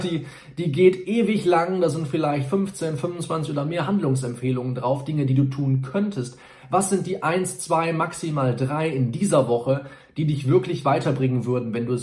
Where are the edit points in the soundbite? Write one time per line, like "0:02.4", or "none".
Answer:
none